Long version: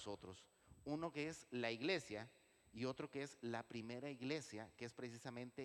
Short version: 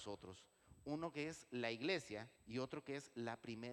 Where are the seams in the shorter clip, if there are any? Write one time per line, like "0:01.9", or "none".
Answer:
0:02.4